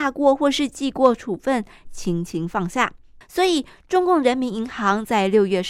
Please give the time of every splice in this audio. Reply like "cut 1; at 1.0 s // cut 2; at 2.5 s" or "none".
cut 1; at 1.8 s // cut 2; at 3.2 s